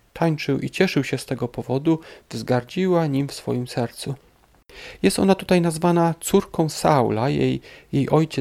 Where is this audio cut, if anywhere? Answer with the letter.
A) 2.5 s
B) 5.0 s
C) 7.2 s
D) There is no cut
D